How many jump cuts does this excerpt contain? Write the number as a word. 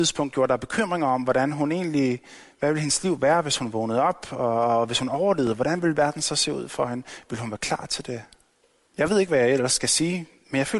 one